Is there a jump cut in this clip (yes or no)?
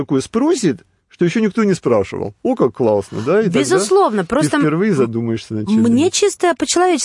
no